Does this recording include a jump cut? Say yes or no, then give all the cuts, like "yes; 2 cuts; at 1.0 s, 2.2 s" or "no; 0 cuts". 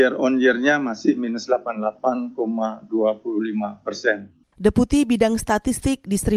yes; 1 cut; at 4.4 s